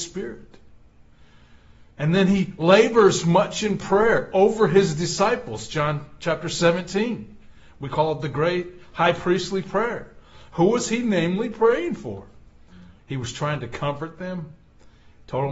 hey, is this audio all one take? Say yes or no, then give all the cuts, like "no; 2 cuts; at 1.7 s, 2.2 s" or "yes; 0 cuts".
no; 2 cuts; at 1.9 s, 13.0 s